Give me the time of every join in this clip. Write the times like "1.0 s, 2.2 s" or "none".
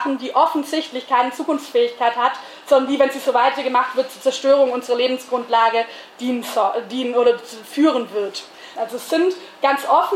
8.7 s